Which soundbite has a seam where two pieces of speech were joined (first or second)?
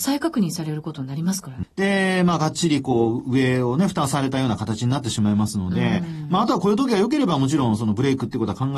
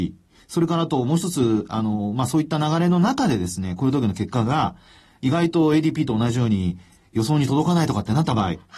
first